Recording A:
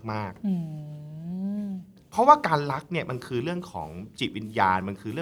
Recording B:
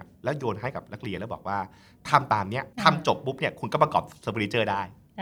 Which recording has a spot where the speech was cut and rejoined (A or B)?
B